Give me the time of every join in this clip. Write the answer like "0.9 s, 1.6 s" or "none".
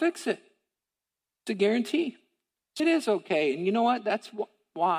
2.8 s